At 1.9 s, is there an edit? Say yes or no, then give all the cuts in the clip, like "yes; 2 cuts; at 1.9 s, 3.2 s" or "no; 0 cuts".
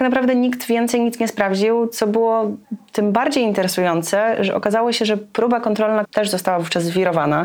no; 1 cut; at 6.0 s